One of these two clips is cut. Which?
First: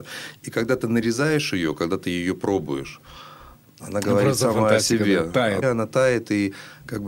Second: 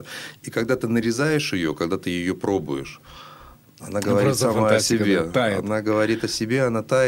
first; 1 cut; at 5.6 s

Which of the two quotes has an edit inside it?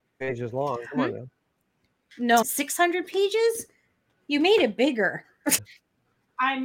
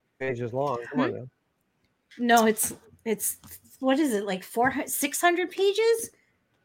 first; 2 cuts; at 2.4 s, 5.6 s

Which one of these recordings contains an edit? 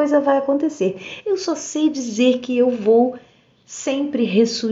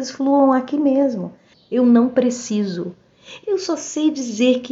second; 2 cuts; at 1.5 s, 3.4 s

